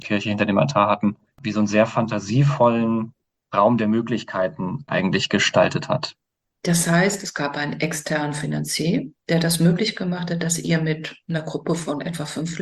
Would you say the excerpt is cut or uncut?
cut